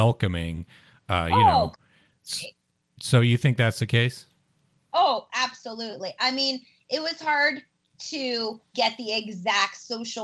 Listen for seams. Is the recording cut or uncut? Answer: cut